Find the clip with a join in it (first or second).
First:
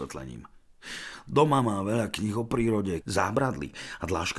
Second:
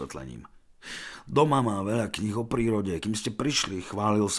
first